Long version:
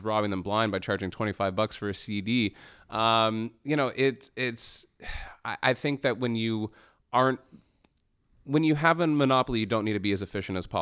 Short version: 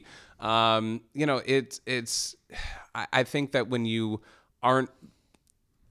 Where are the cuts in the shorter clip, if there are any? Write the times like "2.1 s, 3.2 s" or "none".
none